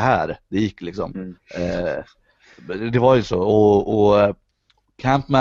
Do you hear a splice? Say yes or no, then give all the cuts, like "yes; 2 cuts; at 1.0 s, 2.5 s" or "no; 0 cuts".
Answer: no; 0 cuts